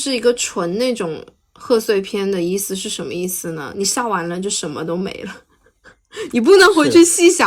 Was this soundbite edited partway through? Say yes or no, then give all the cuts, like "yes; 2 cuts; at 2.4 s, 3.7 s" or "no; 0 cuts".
no; 0 cuts